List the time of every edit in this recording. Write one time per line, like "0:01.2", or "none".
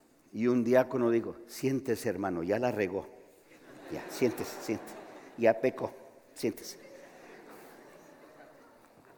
none